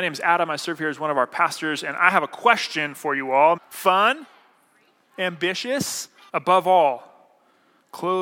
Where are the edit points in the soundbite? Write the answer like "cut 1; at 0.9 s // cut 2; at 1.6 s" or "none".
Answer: cut 1; at 3.6 s // cut 2; at 6.3 s